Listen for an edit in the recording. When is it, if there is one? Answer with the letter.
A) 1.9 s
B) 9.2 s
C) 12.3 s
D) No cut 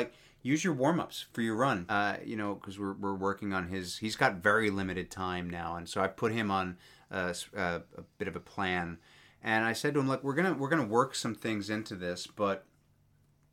A